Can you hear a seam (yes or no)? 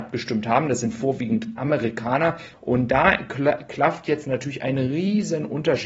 yes